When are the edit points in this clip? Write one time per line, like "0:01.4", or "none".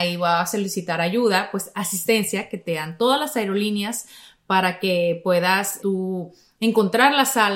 0:05.8